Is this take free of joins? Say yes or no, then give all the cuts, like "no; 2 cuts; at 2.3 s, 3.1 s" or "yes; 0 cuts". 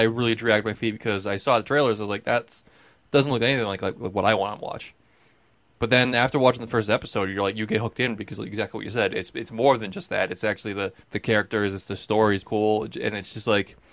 no; 2 cuts; at 11.0 s, 12.4 s